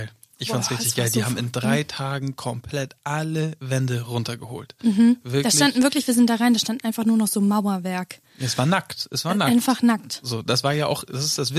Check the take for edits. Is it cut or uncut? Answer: uncut